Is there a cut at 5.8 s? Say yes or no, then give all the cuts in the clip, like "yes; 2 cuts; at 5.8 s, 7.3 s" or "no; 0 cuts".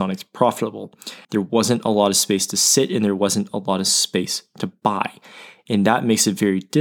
no; 1 cut; at 1.2 s